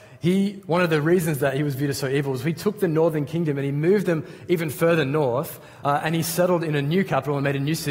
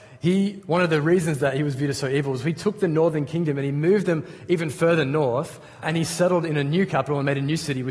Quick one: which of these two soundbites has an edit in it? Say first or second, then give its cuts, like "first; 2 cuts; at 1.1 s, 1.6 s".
second; 1 cut; at 5.8 s